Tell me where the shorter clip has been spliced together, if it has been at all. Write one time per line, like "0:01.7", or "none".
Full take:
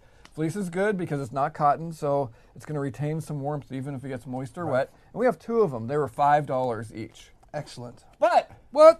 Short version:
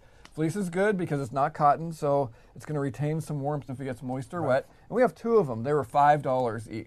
0:03.7